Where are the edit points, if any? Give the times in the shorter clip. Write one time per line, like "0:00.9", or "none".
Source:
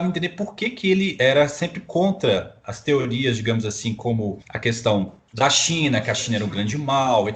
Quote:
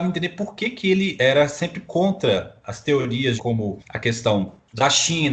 0:03.4